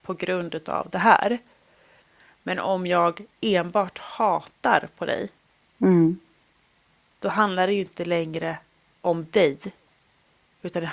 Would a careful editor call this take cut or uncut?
uncut